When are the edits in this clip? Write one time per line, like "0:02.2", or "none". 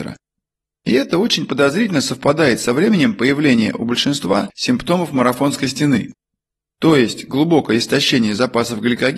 none